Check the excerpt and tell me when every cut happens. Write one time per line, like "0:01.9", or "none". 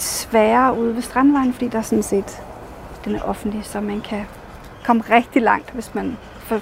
none

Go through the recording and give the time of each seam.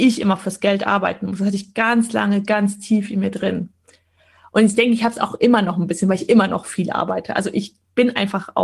none

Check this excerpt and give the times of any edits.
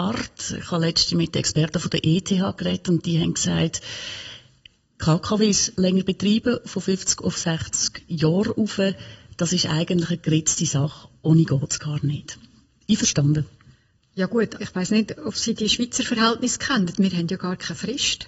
0:14.6

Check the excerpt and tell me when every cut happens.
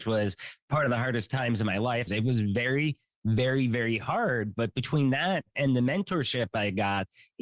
0:02.1

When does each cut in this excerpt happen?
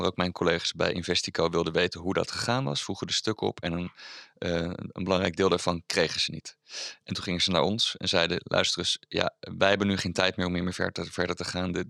none

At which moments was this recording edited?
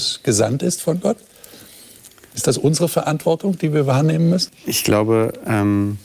0:04.5

